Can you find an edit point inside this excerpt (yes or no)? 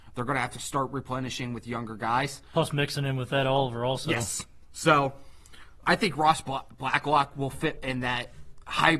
yes